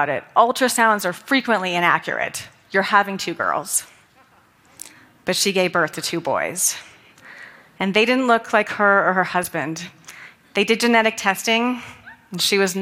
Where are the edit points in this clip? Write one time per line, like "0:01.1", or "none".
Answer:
none

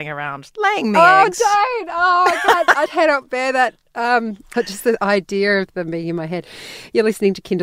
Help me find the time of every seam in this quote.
0:02.9
0:04.5

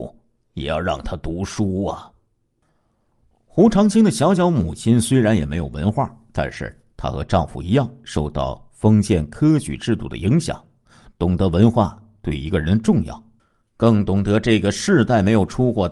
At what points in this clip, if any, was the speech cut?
none

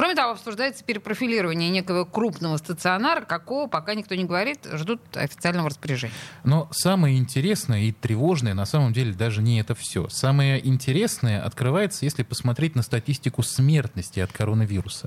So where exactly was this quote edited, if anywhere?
none

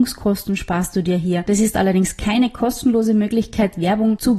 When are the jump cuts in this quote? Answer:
0:01.5

